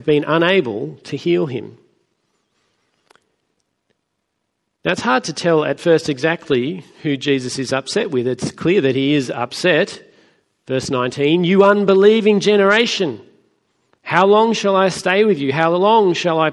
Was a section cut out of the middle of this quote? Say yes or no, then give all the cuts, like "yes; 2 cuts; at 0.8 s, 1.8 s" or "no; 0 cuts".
no; 0 cuts